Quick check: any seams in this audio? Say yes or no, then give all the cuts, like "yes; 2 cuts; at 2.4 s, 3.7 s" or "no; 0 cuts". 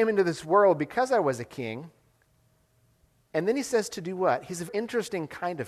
yes; 1 cut; at 4.7 s